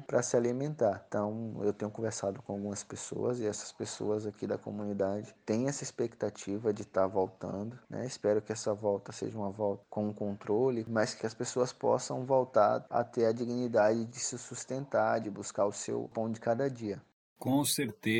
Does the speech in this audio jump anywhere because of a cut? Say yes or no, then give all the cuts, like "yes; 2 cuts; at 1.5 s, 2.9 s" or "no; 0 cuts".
yes; 2 cuts; at 10.8 s, 15.2 s